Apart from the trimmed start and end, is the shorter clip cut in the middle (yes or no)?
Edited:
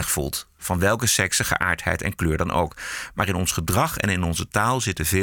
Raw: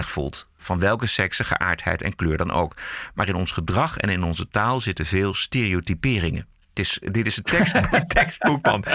no